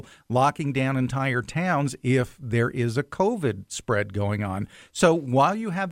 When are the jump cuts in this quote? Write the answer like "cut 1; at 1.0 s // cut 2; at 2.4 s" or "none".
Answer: none